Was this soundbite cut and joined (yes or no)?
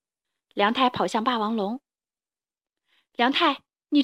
no